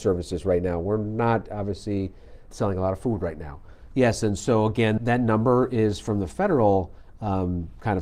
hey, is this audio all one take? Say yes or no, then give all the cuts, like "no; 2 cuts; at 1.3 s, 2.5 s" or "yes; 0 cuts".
no; 3 cuts; at 2.5 s, 3.9 s, 5.0 s